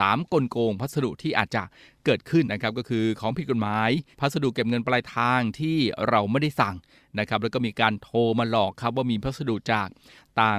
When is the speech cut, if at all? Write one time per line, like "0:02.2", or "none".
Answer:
0:02.5
0:04.1